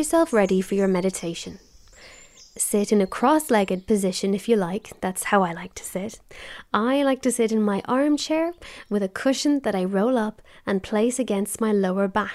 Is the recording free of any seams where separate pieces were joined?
yes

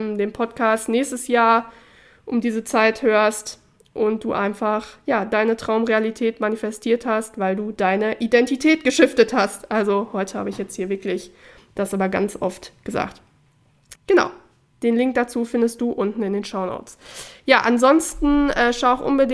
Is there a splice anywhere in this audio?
yes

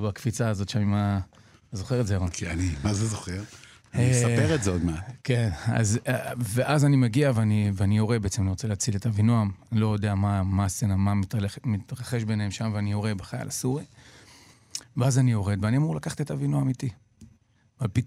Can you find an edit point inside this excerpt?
no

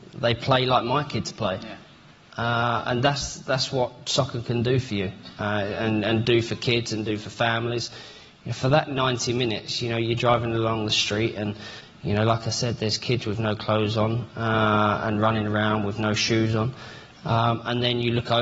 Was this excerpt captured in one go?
yes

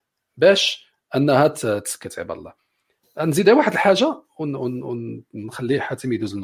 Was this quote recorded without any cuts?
yes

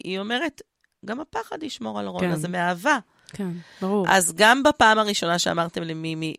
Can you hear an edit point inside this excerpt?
yes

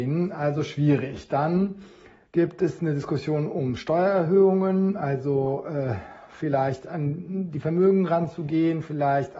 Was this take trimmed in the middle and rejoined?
no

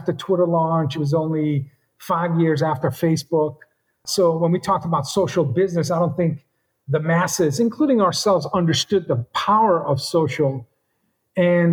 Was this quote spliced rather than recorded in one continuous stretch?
no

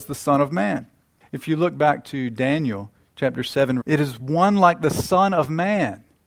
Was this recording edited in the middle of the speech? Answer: yes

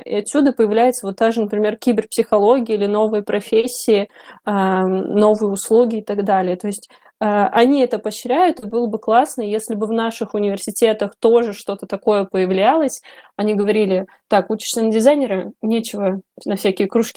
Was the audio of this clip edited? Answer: no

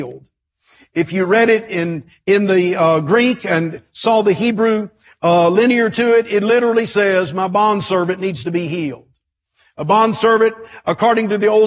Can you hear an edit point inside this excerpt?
no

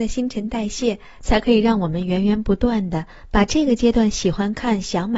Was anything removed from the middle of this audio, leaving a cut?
no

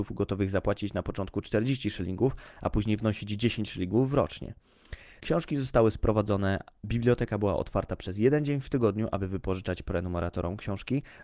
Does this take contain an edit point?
yes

